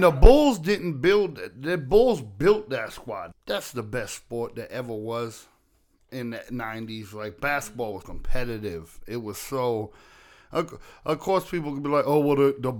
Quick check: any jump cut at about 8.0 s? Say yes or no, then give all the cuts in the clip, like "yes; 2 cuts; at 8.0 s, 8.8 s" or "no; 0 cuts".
yes; 2 cuts; at 3.3 s, 8.0 s